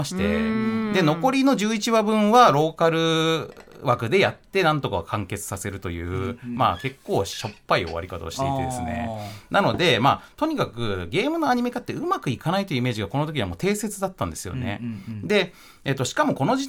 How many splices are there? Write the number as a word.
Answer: zero